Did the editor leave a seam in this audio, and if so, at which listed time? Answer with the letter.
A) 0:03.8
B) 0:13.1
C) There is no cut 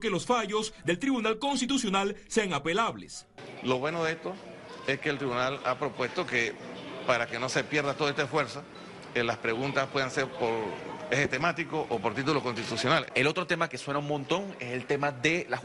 B